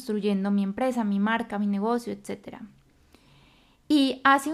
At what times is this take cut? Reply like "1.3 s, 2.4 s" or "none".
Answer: none